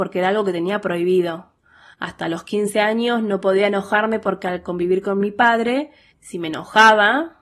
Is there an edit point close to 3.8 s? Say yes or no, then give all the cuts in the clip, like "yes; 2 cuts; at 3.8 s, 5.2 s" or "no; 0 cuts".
no; 2 cuts; at 1.9 s, 6.1 s